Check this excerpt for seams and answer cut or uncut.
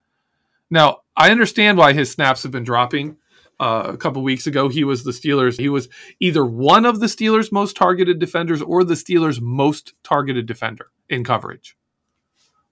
cut